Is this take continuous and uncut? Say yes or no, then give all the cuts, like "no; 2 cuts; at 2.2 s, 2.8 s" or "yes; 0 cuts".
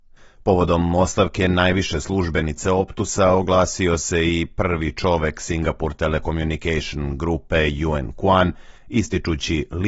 yes; 0 cuts